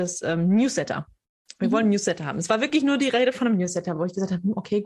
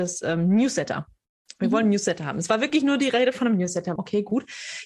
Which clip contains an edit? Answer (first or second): second